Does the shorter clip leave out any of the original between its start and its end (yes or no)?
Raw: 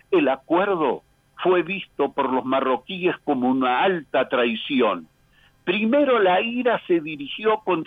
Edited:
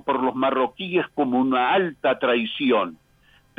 no